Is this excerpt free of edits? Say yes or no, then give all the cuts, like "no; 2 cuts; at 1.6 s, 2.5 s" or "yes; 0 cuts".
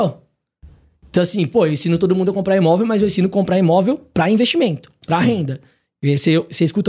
yes; 0 cuts